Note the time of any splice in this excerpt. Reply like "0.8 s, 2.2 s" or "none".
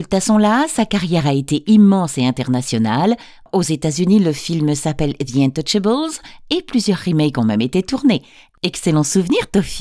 none